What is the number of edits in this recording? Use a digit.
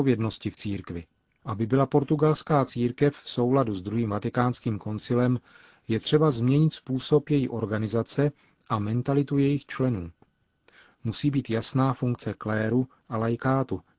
1